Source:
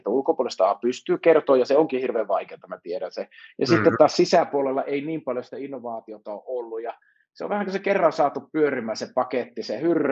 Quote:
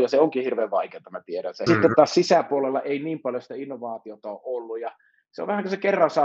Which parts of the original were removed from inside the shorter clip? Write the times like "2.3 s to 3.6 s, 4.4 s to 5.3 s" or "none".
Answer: 3.2 s to 3.7 s